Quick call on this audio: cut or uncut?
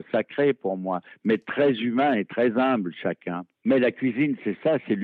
cut